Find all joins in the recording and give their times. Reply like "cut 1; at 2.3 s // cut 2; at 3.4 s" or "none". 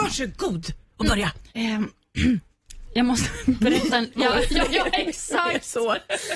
cut 1; at 1.5 s // cut 2; at 4.2 s